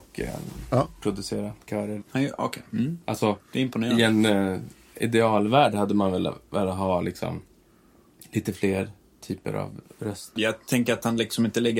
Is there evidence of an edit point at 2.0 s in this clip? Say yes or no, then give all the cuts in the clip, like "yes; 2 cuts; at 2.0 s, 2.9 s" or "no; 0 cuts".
yes; 2 cuts; at 2.0 s, 10.4 s